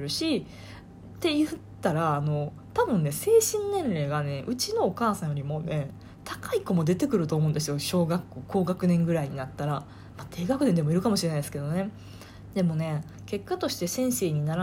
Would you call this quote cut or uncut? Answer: cut